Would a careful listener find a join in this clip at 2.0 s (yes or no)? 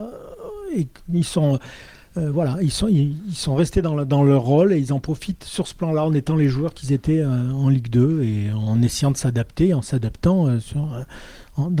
no